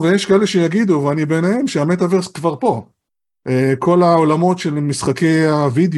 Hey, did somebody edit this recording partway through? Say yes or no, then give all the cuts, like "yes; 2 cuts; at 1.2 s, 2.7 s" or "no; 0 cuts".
no; 0 cuts